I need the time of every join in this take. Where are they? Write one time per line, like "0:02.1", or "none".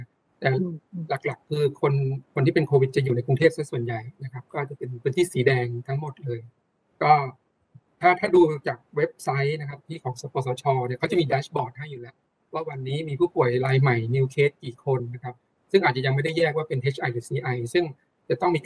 none